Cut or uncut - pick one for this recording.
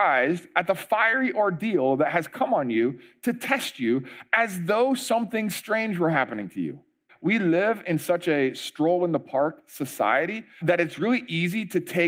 cut